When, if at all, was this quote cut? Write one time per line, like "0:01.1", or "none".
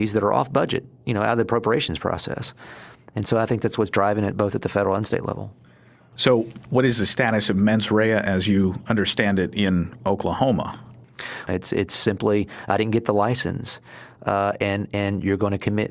0:11.5